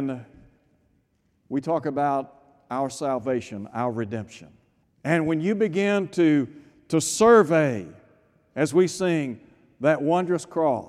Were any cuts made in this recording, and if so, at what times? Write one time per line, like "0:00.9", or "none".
0:04.8